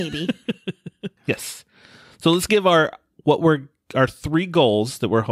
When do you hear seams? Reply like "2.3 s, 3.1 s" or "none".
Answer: 1.2 s